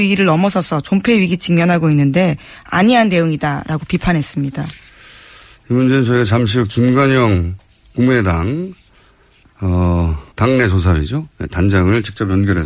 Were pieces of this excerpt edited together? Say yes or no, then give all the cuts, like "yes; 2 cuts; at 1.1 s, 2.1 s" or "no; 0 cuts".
yes; 1 cut; at 10.3 s